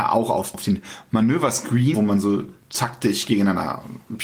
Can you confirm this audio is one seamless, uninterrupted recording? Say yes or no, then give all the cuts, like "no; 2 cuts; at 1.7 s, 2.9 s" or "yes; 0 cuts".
no; 1 cut; at 1.9 s